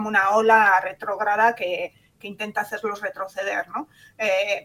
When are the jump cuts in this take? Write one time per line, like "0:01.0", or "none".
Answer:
none